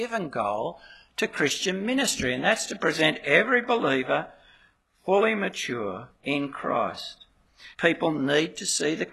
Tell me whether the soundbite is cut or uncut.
cut